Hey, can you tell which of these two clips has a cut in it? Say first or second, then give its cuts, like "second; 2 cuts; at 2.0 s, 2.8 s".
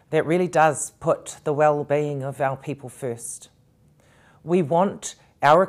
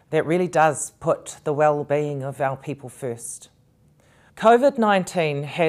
second; 1 cut; at 4.3 s